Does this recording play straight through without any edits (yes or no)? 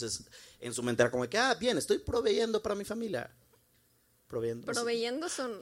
yes